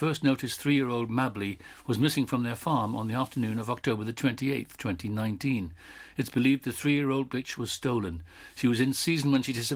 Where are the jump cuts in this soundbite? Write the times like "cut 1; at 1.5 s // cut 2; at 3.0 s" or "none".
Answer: none